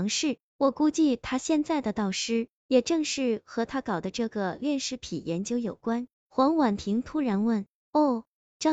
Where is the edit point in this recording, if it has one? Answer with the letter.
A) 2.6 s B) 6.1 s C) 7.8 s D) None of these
B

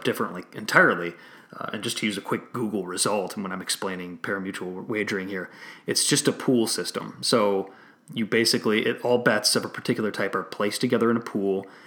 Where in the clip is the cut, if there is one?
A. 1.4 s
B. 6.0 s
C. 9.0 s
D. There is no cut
D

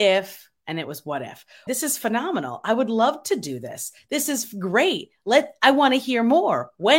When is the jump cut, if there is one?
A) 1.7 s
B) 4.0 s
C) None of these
A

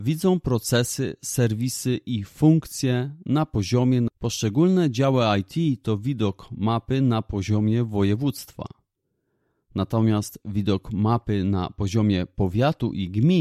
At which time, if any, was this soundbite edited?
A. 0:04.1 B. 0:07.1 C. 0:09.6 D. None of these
A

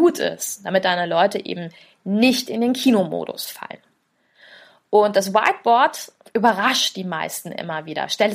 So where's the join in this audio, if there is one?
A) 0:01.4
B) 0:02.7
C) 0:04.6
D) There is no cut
D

